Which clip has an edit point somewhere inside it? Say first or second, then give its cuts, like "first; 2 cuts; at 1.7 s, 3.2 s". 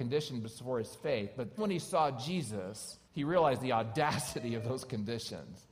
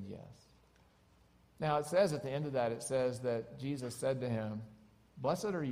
first; 2 cuts; at 1.6 s, 3.0 s